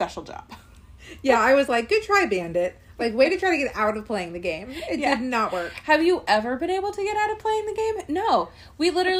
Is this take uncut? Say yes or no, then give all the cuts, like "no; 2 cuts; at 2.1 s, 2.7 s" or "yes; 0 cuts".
yes; 0 cuts